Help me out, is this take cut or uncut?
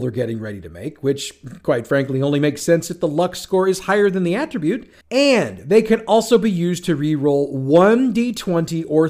cut